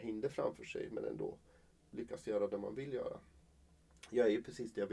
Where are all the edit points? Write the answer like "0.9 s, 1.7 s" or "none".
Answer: none